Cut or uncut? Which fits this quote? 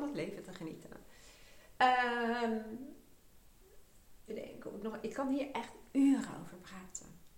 cut